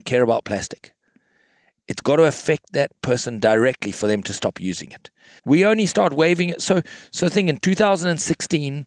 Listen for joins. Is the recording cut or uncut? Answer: cut